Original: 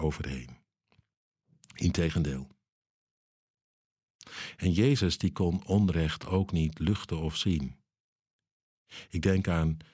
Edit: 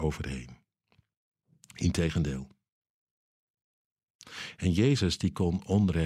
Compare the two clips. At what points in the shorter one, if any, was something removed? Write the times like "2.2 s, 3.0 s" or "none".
none